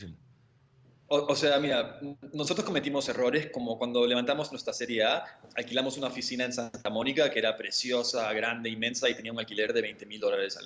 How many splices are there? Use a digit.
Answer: 0